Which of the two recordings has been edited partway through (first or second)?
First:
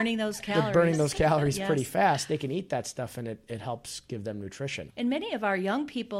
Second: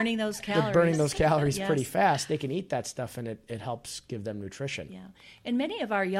first